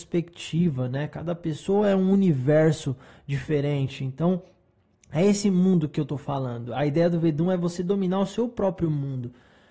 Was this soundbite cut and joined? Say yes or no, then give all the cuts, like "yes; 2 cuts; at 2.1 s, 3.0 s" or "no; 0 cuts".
no; 0 cuts